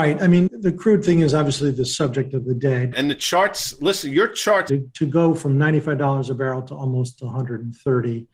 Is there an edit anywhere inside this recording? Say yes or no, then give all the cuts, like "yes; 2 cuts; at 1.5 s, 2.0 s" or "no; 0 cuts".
yes; 2 cuts; at 2.9 s, 4.7 s